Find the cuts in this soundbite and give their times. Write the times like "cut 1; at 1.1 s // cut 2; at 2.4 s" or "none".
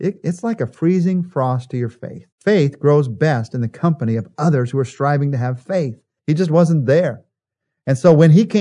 cut 1; at 2.3 s // cut 2; at 6.2 s